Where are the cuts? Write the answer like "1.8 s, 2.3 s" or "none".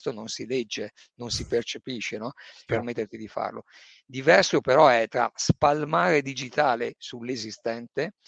2.7 s